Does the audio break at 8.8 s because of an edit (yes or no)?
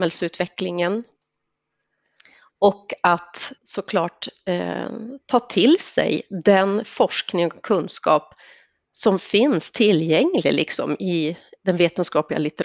no